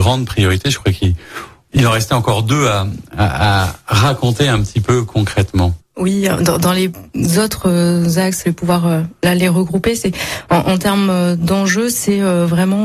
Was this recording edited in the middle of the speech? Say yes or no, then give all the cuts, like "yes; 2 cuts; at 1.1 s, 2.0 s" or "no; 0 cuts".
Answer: yes; 1 cut; at 8.4 s